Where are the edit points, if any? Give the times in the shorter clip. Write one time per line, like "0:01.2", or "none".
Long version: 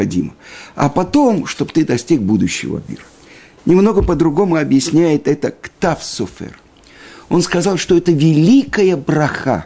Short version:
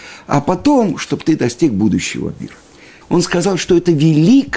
0:03.0